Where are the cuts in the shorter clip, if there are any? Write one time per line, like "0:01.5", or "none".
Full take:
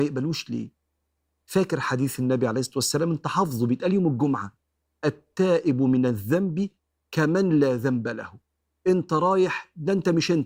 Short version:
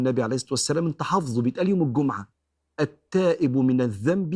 none

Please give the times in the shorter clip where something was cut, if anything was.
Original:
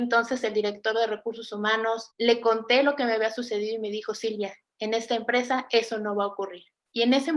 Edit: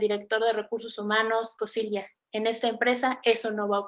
0:01.6

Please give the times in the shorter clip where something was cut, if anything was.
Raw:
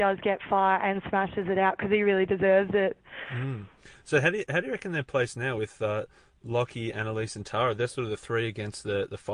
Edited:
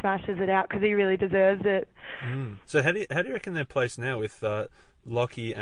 0:02.6

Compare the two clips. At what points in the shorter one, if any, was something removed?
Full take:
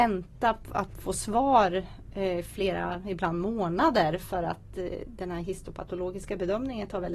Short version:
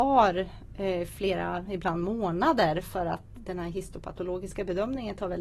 0:03.3

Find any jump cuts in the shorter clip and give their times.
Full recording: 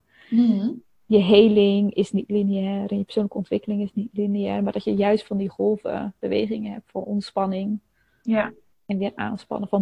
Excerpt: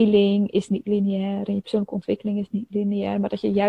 none

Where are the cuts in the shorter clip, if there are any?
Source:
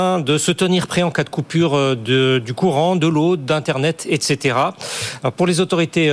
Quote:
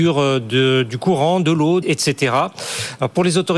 0:01.8

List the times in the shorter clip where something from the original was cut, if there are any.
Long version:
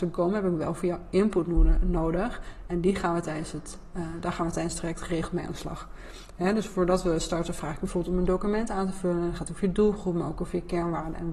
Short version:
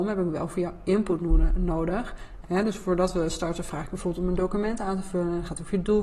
0:02.4

